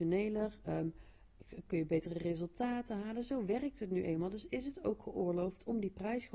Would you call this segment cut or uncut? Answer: cut